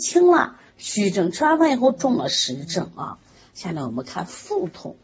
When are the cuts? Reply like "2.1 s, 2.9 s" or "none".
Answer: none